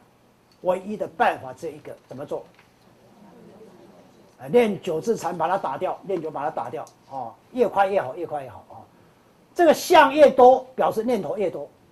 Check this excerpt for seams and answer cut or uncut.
cut